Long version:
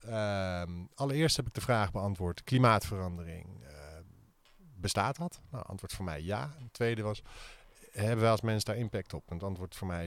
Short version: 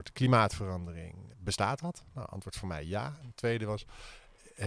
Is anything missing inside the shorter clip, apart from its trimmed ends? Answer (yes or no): yes